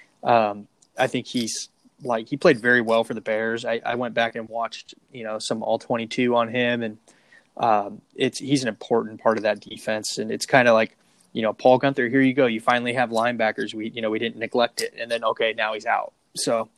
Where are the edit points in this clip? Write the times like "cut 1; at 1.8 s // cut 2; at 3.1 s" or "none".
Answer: none